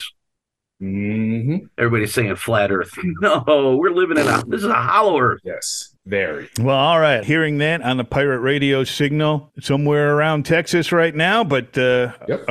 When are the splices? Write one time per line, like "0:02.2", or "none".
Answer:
0:06.0
0:07.2
0:09.5